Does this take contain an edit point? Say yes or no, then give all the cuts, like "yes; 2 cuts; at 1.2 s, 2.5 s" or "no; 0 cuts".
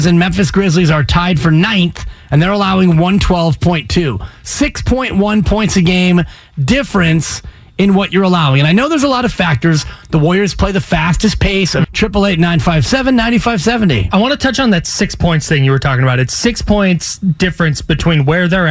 yes; 1 cut; at 11.8 s